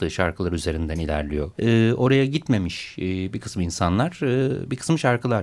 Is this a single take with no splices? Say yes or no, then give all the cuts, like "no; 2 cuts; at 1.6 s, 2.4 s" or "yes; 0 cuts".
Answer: no; 1 cut; at 1.5 s